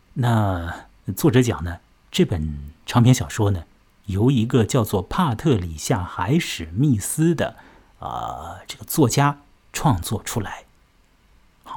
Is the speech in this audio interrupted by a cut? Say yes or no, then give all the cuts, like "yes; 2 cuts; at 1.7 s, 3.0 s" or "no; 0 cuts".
no; 0 cuts